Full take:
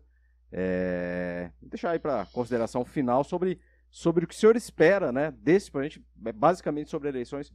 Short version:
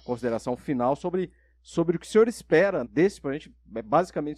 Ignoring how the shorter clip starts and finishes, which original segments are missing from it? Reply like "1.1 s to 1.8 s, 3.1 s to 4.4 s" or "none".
5.1 s to 5.3 s